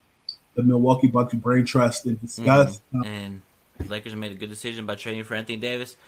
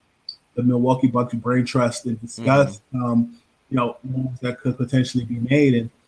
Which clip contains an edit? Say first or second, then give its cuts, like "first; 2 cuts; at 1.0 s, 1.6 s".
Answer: first; 1 cut; at 3.0 s